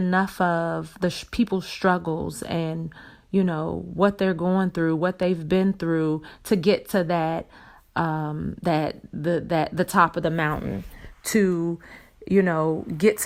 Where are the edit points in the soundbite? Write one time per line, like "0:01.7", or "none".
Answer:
none